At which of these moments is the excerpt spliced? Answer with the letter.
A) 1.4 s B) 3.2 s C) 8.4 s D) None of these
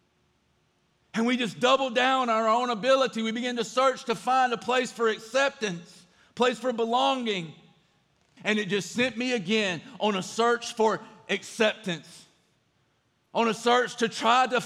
C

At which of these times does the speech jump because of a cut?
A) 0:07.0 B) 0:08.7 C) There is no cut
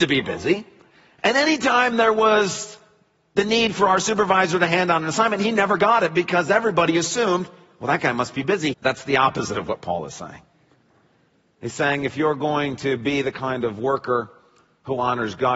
B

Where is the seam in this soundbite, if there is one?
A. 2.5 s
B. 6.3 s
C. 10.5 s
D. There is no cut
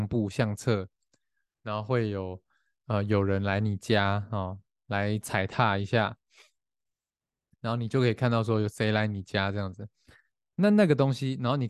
D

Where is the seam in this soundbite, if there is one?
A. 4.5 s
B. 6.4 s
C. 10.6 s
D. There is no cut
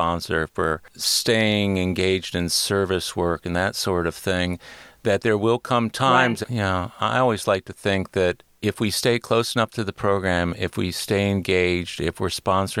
B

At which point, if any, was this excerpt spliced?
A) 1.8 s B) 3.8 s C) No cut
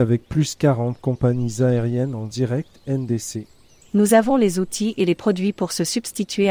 B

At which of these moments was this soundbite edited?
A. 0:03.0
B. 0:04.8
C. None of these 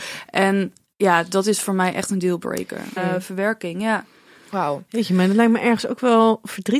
A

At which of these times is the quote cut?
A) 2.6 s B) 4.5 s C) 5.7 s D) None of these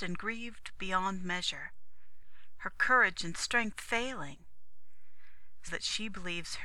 C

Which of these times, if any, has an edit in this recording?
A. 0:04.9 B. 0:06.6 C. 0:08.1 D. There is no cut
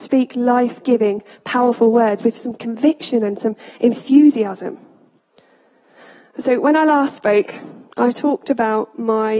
D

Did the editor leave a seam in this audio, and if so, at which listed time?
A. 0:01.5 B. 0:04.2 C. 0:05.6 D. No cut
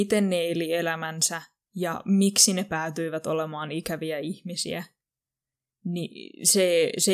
D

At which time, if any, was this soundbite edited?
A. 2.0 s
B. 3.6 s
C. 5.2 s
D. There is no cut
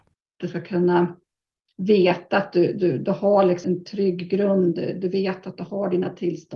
B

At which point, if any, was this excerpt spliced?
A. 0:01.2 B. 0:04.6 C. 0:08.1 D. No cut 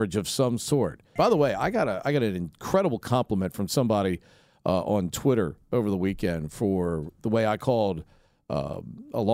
A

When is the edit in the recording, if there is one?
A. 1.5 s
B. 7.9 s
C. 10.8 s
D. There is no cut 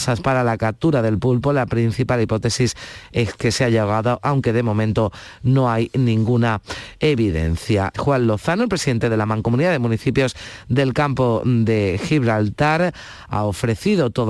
B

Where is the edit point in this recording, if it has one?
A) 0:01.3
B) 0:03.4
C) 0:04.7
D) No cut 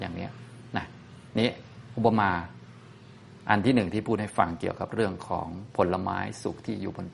A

